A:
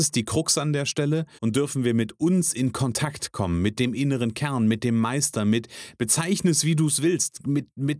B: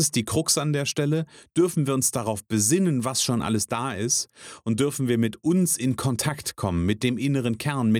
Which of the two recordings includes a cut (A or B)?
A